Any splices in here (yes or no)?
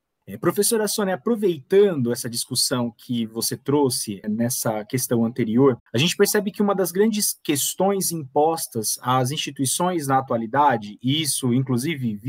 no